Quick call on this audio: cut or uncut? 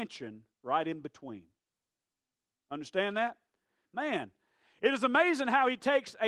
cut